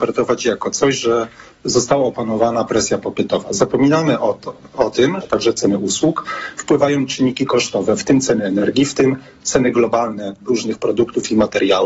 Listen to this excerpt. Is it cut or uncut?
cut